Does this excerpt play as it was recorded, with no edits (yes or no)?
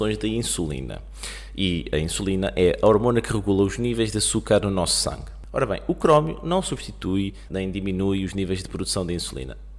no